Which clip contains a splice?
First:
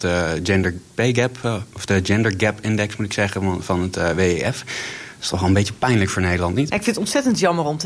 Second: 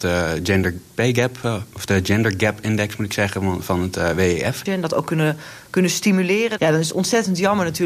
second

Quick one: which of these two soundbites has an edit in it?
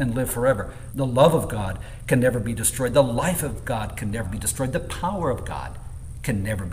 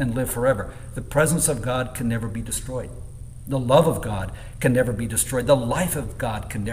first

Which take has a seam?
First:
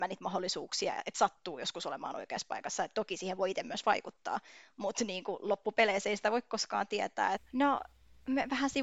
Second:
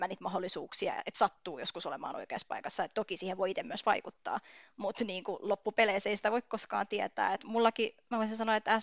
first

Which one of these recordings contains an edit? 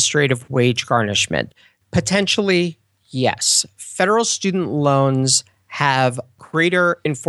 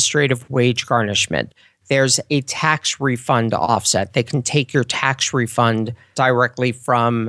first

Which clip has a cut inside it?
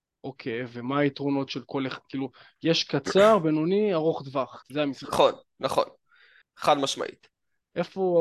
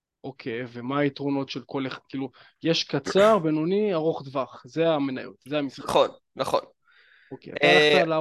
first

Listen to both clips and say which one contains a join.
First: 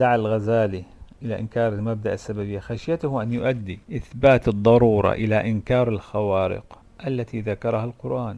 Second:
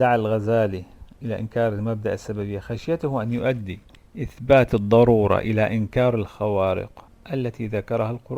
first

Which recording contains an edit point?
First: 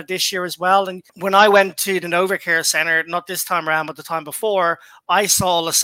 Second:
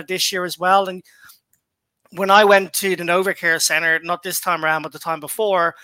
first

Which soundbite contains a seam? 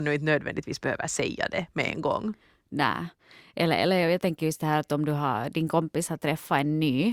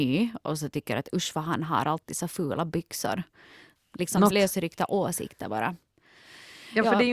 second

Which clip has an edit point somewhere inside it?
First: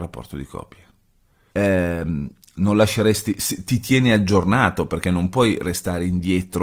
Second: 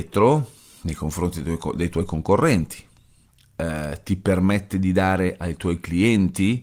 first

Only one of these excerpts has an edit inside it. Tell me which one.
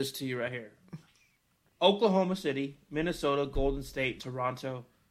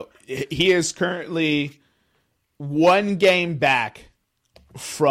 first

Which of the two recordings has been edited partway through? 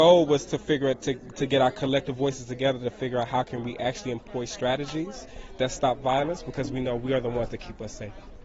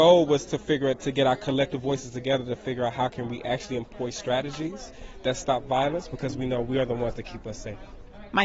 second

